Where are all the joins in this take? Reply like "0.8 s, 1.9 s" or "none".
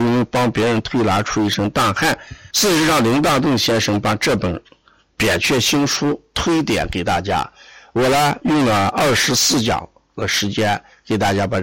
2.5 s